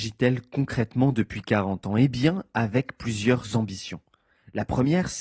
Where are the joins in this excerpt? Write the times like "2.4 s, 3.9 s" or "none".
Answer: none